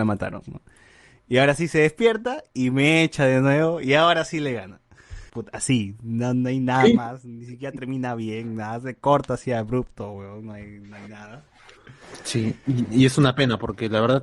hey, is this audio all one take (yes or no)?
no